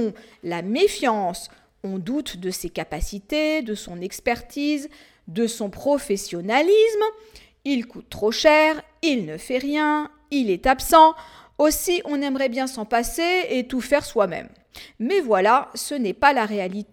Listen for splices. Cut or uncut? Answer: uncut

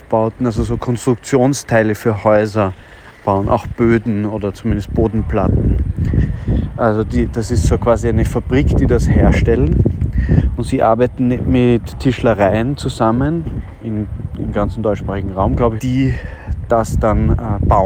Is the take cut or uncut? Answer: cut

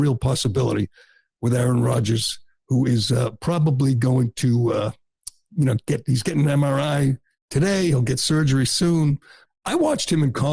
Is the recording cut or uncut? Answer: cut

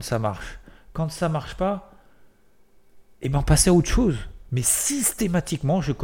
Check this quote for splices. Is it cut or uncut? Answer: cut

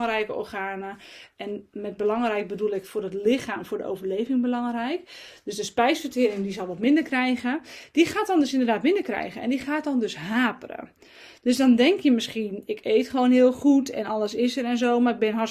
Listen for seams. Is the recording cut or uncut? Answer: uncut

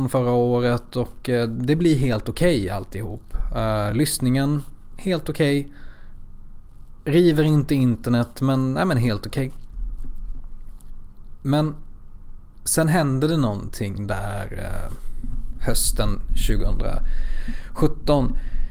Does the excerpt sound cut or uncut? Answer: uncut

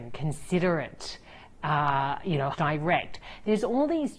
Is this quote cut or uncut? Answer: cut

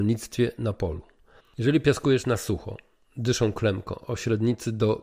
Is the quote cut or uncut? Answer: cut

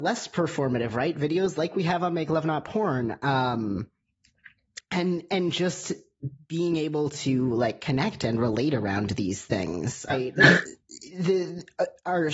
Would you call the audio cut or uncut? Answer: cut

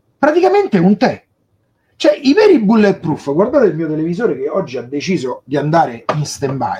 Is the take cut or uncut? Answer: uncut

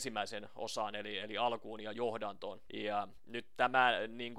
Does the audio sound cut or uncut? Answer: cut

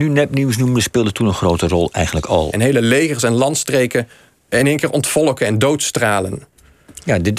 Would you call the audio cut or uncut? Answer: cut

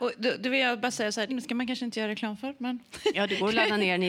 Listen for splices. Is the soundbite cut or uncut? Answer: cut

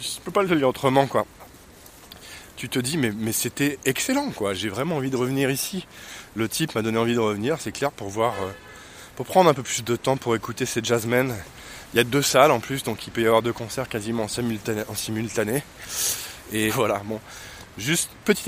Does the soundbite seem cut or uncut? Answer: cut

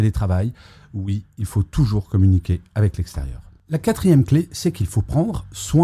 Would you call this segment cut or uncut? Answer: uncut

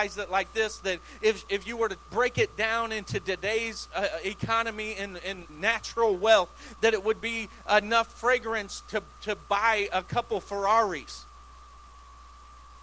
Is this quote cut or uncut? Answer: cut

